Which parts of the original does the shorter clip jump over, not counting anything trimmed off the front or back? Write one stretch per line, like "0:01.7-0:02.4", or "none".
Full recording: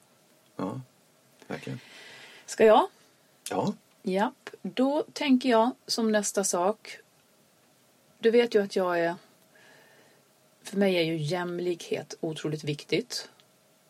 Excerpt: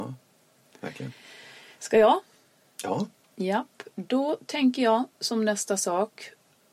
none